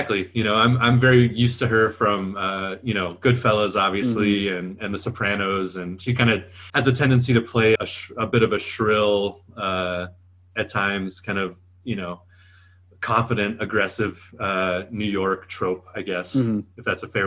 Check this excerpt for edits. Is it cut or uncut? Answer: cut